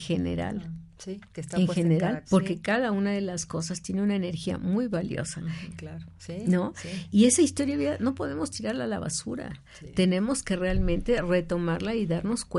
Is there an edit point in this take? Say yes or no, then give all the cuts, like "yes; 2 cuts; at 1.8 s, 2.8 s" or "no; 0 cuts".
yes; 2 cuts; at 2.2 s, 5.7 s